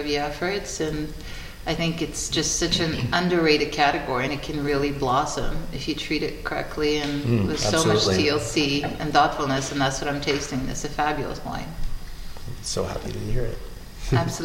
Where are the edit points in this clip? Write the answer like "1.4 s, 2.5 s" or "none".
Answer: none